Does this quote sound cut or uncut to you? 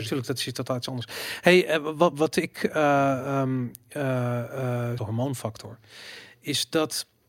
cut